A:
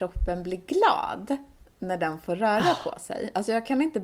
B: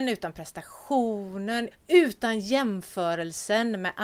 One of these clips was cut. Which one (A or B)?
B